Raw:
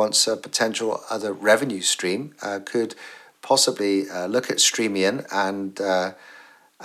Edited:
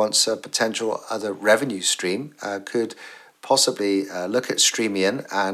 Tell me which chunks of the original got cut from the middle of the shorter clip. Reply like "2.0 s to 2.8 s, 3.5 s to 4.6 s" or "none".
none